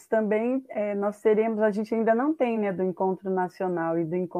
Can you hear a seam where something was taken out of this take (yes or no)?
no